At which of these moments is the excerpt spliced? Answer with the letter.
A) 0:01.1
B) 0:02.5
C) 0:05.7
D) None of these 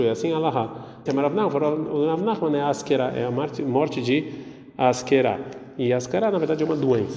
A